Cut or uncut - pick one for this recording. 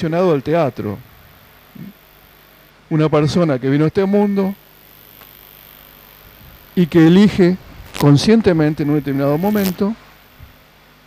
cut